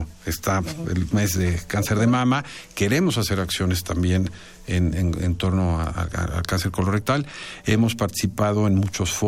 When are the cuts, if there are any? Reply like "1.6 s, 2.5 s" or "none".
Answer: none